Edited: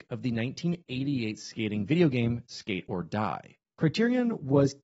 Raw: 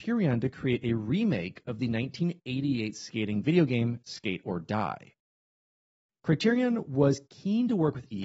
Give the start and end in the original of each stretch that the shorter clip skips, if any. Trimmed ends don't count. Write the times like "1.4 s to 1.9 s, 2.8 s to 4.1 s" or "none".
5.2 s to 6.1 s